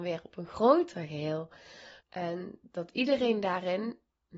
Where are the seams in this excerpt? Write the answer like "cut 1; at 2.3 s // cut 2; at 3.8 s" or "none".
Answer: cut 1; at 2.0 s